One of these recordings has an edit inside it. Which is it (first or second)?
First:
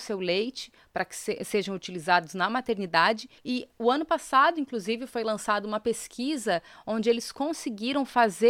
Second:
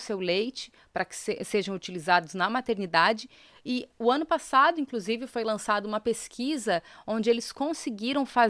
first